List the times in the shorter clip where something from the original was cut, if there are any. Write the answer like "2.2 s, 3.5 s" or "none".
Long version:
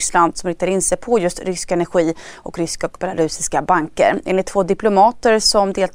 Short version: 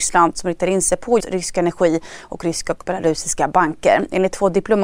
1.2 s